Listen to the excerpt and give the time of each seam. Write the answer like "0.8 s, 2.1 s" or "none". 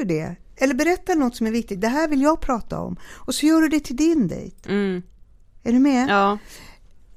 none